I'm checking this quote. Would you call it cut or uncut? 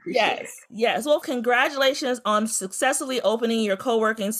cut